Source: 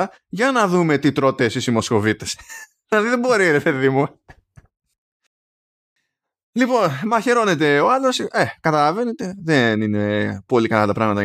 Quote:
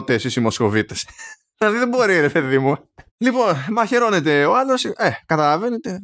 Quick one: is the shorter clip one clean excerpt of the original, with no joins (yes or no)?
no